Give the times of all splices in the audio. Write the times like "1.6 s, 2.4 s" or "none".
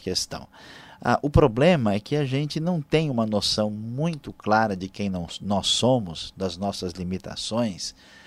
none